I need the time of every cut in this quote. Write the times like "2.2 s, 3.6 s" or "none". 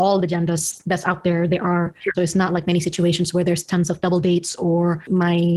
2.1 s